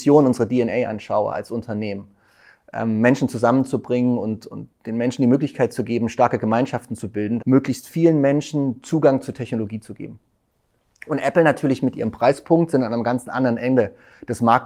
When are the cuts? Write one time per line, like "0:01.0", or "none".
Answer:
0:07.4